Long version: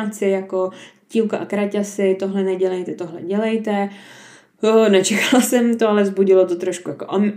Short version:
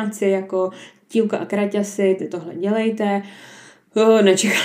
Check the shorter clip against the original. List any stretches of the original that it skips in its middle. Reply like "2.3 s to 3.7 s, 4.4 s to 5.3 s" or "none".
2.2 s to 2.9 s